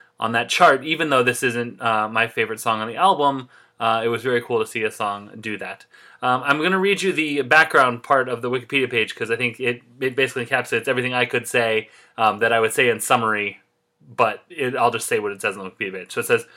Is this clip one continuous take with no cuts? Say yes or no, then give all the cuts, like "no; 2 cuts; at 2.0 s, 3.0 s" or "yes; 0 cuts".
yes; 0 cuts